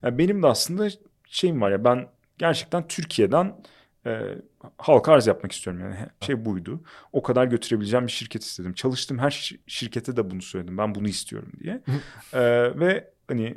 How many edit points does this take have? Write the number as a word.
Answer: one